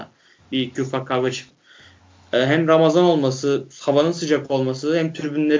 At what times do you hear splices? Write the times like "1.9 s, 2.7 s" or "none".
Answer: 1.5 s